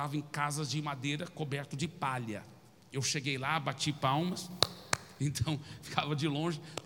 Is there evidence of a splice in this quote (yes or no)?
yes